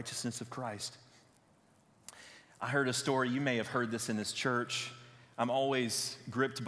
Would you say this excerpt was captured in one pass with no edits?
yes; 0 cuts

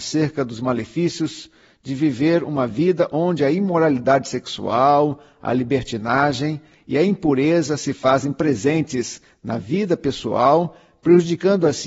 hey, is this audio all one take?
yes; 0 cuts

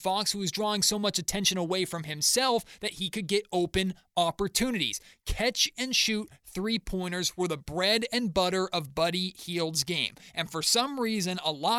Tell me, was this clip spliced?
no; 0 cuts

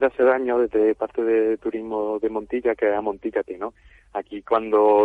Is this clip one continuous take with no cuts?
yes; 0 cuts

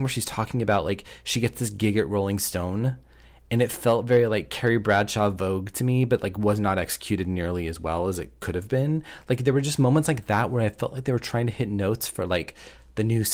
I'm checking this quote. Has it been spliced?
no; 0 cuts

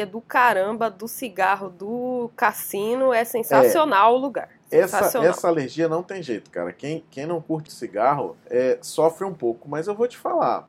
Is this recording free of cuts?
no; 1 cut; at 7.7 s

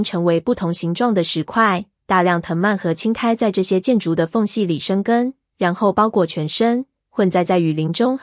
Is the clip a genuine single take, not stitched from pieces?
yes; 0 cuts

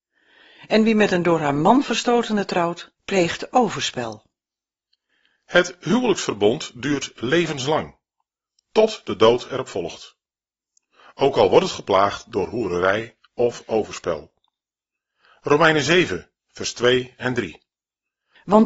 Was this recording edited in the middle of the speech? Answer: yes; 1 cut; at 3.0 s

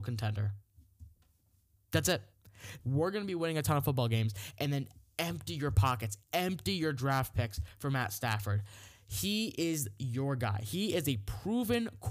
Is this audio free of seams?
no; 1 cut; at 2.8 s

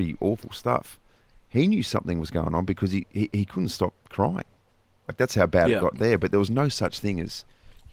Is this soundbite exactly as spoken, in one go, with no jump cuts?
yes; 0 cuts

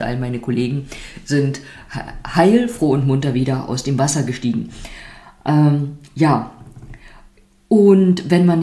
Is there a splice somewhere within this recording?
no; 0 cuts

